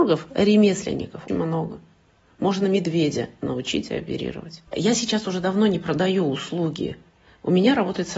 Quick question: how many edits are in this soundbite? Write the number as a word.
two